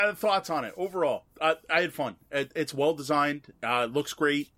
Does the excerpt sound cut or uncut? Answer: uncut